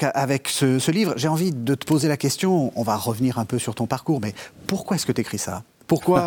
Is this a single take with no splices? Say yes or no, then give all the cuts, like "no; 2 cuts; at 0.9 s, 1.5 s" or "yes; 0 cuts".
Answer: yes; 0 cuts